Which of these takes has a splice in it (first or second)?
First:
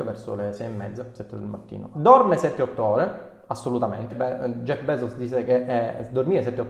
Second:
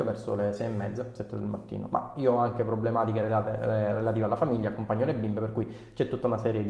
first